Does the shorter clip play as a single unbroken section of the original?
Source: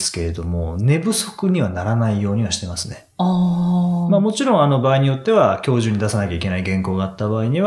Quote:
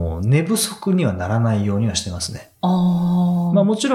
yes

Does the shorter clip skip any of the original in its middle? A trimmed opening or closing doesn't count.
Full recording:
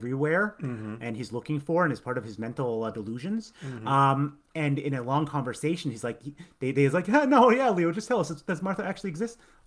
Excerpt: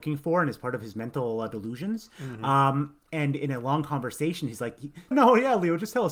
yes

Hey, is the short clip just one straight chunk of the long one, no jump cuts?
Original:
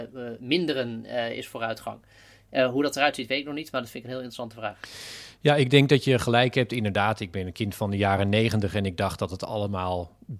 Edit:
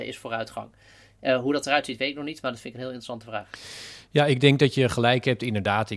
yes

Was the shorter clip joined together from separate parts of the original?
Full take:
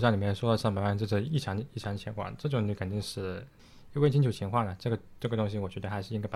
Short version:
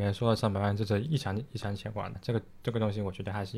yes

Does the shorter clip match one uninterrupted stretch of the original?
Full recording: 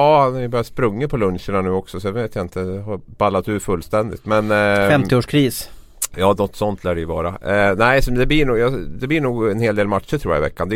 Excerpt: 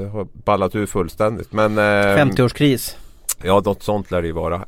yes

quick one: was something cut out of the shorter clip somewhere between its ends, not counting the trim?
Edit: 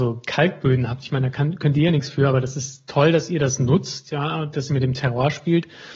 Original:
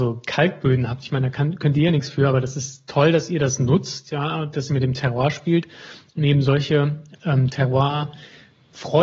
no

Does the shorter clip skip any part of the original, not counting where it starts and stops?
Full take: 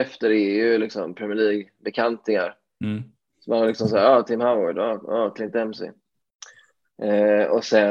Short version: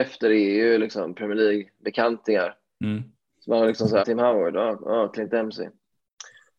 yes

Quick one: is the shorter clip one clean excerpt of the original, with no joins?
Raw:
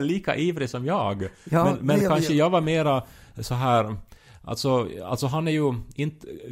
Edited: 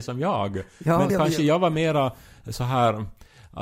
no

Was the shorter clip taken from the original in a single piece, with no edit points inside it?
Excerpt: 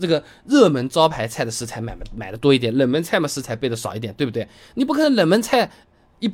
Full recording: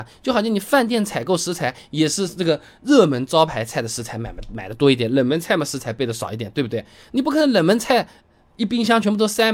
yes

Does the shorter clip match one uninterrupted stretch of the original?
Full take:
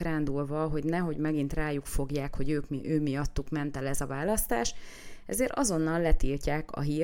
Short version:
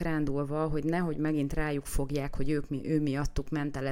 yes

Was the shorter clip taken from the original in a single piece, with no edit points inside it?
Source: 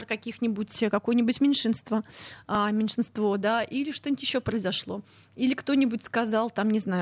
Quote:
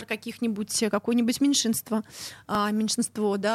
yes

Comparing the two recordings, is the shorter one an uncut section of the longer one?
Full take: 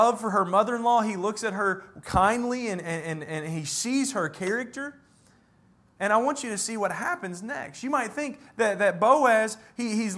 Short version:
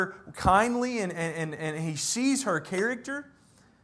yes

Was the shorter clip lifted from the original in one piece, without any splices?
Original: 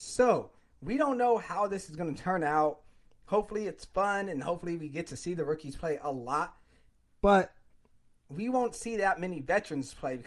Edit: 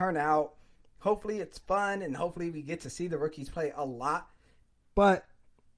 yes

